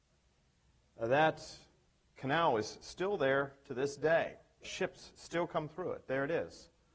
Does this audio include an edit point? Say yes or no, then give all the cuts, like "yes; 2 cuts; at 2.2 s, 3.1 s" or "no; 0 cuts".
yes; 1 cut; at 4.6 s